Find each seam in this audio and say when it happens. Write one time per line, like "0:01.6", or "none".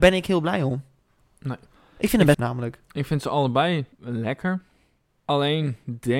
0:02.3
0:03.9